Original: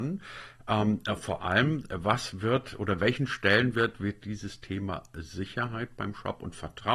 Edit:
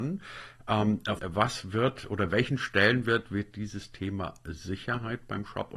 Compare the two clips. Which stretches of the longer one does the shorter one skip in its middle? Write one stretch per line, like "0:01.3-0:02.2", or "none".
0:01.2-0:01.9